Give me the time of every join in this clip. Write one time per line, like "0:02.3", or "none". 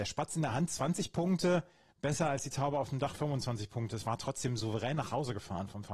none